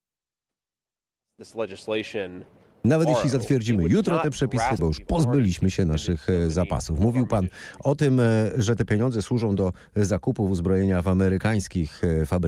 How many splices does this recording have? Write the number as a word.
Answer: one